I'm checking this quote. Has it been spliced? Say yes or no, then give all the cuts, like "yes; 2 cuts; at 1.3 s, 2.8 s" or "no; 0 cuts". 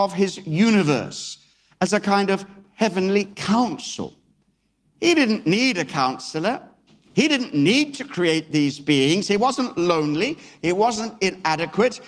no; 0 cuts